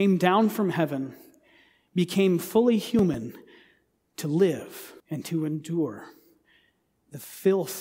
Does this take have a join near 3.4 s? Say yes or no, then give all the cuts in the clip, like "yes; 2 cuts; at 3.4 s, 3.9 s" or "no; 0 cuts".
no; 1 cut; at 5.0 s